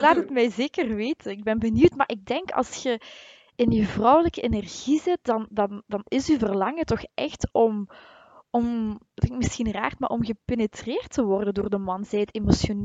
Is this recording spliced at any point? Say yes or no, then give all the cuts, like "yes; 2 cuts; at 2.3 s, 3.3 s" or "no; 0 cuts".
no; 0 cuts